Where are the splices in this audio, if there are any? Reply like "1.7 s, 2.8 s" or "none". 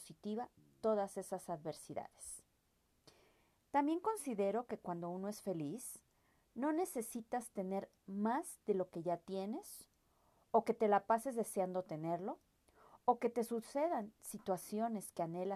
none